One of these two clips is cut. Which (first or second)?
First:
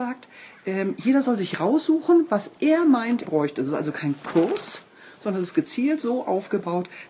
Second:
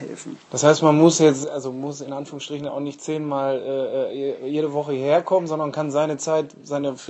first